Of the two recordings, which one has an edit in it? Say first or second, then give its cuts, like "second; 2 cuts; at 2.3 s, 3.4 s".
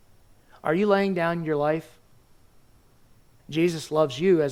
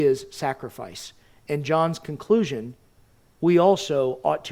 first; 1 cut; at 3.4 s